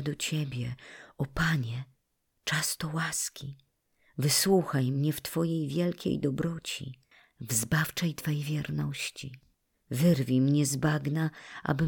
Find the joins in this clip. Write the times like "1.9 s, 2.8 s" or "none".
none